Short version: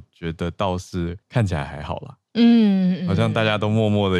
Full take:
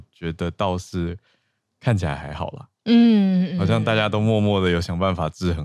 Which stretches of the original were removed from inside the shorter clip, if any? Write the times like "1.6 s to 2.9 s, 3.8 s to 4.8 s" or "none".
1.2 s to 1.7 s